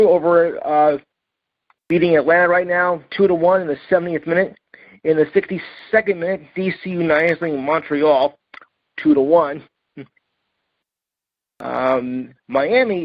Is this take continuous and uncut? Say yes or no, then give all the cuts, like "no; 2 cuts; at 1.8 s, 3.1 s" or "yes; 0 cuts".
yes; 0 cuts